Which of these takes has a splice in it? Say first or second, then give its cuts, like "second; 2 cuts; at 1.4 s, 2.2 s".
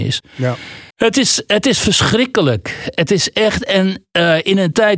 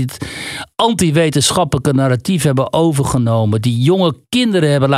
first; 1 cut; at 0.9 s